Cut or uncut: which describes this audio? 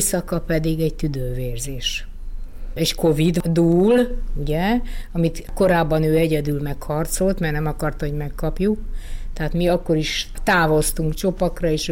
uncut